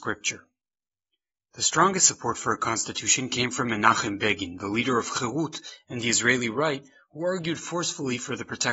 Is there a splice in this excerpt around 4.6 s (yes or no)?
no